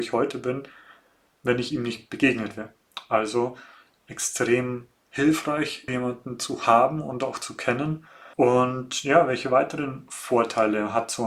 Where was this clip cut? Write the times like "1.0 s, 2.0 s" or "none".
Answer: 5.9 s, 8.3 s